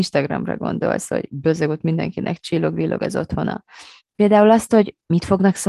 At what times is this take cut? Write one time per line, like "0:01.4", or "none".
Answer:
0:04.0